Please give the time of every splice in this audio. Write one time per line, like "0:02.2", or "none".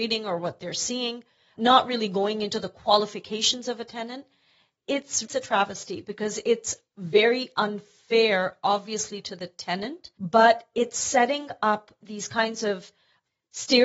0:05.2
0:10.1